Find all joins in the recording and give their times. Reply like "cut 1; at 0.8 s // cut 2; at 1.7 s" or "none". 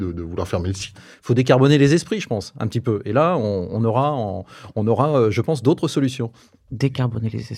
cut 1; at 0.9 s